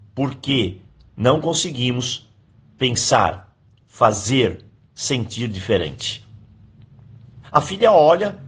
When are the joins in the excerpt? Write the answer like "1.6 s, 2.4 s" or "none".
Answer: 7.4 s